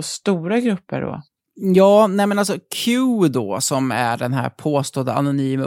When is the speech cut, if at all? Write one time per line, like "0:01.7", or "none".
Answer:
none